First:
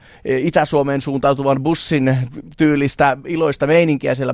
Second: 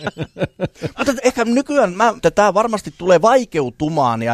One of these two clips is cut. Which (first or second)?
second